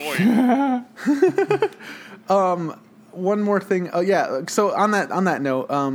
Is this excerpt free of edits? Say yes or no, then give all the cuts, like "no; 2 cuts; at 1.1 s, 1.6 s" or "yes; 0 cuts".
yes; 0 cuts